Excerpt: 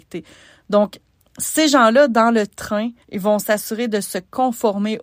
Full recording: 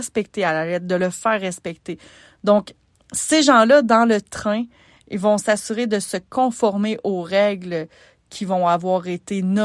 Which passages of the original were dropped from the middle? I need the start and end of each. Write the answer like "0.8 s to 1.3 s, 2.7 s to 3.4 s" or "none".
4.8 s to 5.0 s